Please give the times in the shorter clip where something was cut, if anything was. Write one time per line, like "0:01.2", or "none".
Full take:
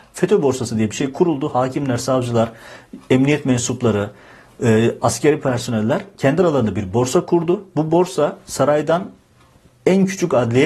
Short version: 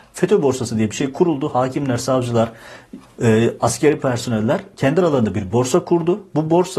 0:03.1